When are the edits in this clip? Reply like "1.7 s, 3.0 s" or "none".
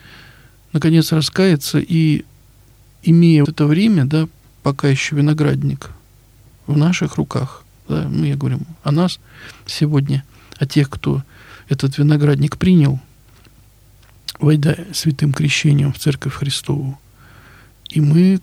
3.5 s